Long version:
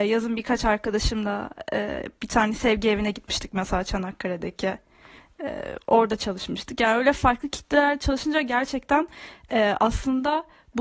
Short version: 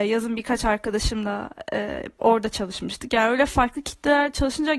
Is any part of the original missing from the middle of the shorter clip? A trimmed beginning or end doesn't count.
yes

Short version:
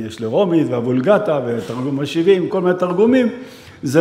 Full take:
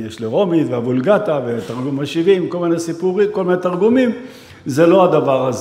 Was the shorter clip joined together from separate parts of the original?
yes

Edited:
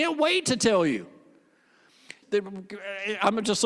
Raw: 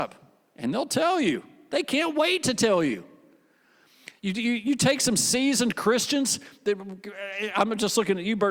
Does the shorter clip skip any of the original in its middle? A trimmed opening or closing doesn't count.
yes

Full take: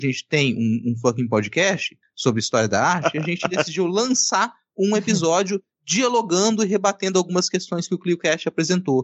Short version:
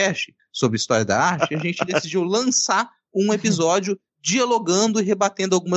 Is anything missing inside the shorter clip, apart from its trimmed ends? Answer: no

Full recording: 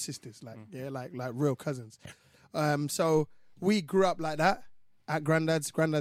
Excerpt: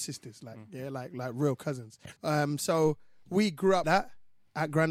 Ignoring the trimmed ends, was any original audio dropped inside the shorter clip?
yes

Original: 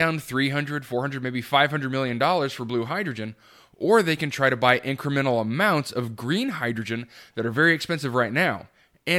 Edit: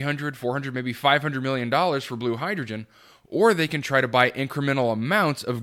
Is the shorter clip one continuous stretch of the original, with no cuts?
yes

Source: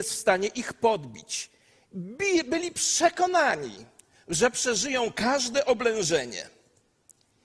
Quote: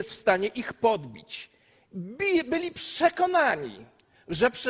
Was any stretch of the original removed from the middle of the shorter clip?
no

